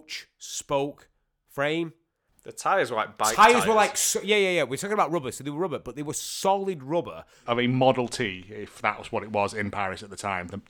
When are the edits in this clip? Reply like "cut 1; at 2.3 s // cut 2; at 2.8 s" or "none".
cut 1; at 2.3 s // cut 2; at 7.5 s